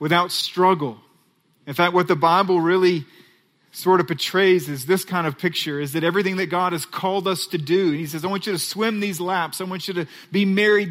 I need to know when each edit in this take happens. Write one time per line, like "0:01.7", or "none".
none